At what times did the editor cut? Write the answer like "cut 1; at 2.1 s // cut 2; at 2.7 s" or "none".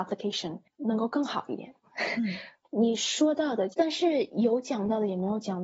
cut 1; at 1.8 s // cut 2; at 3.7 s